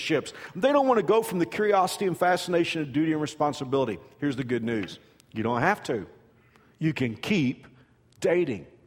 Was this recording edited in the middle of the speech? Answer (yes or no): no